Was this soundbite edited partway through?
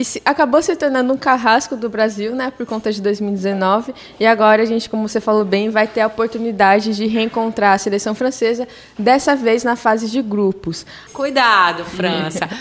yes; 1 cut; at 11.1 s

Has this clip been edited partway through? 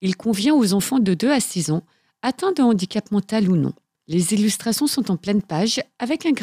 no; 0 cuts

